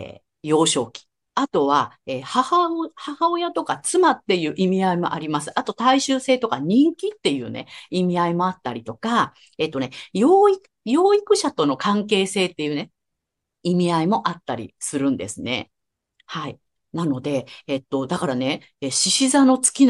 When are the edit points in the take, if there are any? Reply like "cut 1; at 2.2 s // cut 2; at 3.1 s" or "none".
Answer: none